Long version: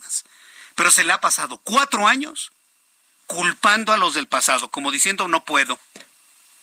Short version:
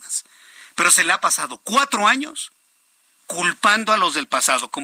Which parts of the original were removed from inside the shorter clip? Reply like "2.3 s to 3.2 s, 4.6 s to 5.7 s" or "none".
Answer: none